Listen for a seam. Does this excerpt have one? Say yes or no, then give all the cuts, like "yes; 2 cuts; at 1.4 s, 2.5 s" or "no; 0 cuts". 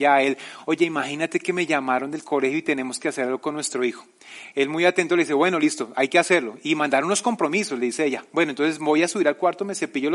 no; 0 cuts